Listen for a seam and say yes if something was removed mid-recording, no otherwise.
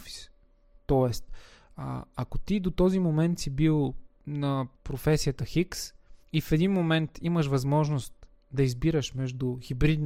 yes